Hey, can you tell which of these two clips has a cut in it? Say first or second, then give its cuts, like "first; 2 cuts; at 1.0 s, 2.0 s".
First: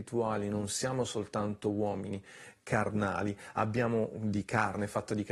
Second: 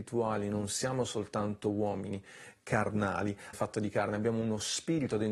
second; 1 cut; at 3.5 s